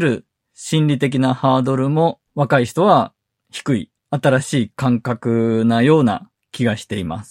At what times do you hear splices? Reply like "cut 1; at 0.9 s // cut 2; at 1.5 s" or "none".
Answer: cut 1; at 2.3 s // cut 2; at 4.0 s